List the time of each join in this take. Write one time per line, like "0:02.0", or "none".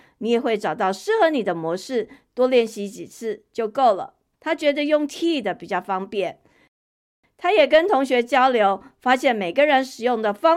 0:04.3